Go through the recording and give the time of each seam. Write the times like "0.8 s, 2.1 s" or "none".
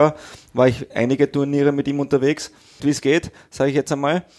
2.8 s